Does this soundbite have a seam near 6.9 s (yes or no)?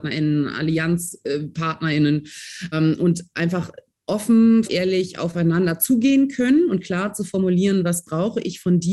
no